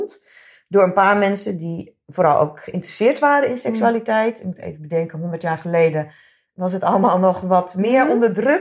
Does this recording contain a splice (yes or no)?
no